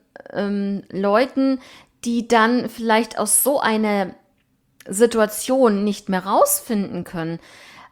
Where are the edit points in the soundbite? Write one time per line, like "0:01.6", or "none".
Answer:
none